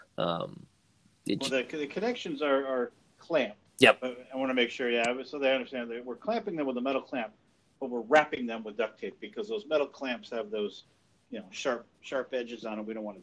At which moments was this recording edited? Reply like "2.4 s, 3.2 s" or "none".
3.7 s